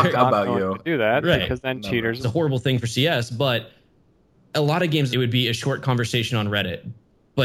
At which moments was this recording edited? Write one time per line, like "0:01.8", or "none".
0:02.2
0:05.1